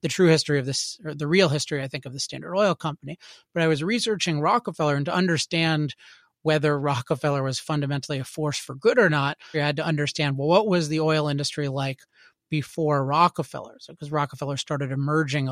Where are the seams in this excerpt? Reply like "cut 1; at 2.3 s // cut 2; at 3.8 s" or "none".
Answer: cut 1; at 9.5 s